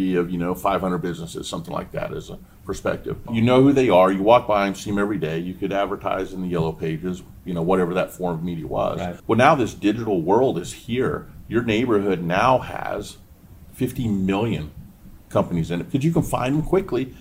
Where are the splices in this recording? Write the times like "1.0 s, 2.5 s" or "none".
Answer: 3.3 s, 9.2 s